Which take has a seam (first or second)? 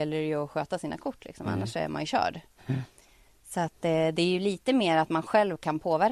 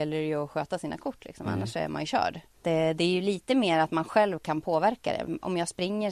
second